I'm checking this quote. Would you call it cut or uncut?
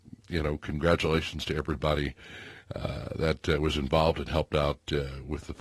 uncut